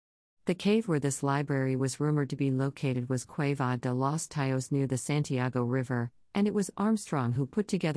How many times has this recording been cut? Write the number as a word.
zero